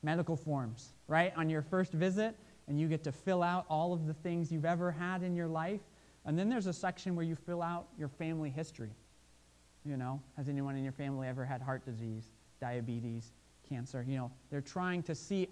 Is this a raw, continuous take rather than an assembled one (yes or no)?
yes